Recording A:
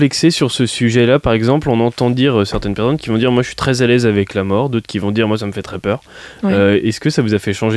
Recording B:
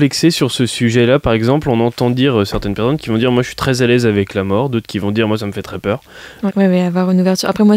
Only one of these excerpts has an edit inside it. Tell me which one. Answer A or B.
B